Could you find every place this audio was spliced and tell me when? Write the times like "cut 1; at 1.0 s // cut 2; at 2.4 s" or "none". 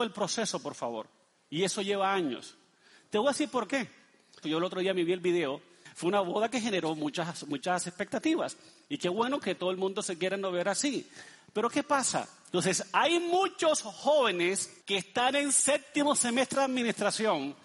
cut 1; at 4.4 s // cut 2; at 12.5 s // cut 3; at 14.8 s